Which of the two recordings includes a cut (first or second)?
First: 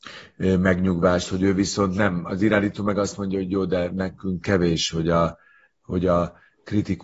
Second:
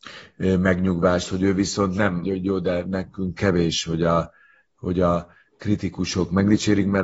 second